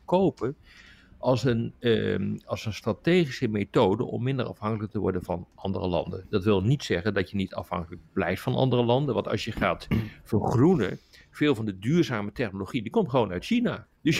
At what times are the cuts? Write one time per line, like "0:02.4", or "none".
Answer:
none